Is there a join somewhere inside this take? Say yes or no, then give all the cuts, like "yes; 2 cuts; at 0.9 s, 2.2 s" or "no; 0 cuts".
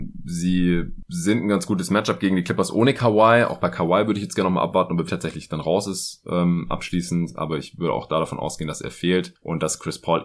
yes; 1 cut; at 5.1 s